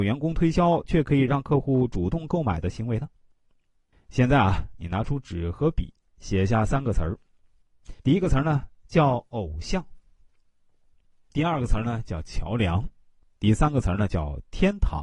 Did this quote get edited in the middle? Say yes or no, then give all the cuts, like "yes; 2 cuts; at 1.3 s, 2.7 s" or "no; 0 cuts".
yes; 2 cuts; at 3.9 s, 8.0 s